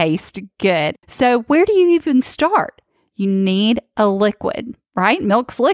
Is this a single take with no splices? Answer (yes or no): no